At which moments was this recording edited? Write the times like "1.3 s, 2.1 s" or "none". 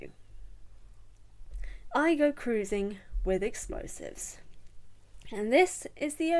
1.9 s